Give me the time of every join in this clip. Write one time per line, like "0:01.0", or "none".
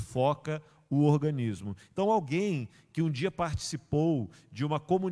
none